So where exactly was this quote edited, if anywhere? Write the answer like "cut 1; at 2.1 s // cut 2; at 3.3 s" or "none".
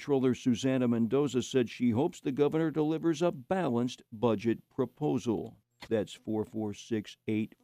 cut 1; at 5.9 s